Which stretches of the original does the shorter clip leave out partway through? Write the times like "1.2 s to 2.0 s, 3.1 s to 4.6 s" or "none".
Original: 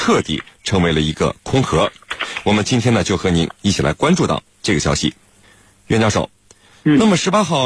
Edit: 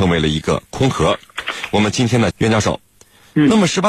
3.0 s to 5.8 s